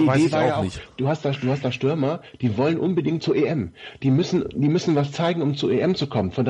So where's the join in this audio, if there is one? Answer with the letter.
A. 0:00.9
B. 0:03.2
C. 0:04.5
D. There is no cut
B